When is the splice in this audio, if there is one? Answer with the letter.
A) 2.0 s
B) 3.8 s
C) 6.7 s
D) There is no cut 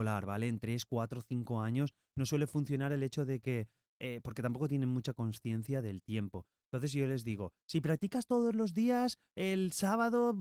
D